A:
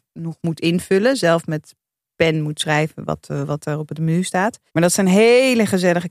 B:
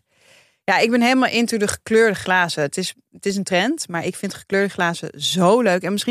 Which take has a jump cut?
A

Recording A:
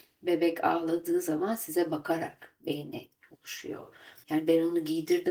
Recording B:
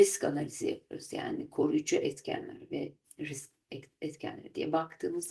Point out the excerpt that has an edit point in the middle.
A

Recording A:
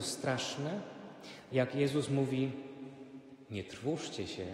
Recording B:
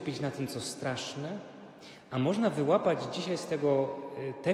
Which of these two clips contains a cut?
A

